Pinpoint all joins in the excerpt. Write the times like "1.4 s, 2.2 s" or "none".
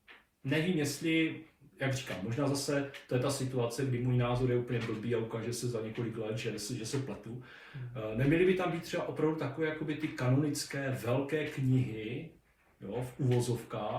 none